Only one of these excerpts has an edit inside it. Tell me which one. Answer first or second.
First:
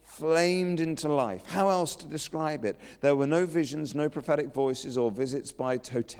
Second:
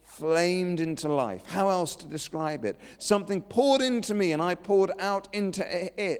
second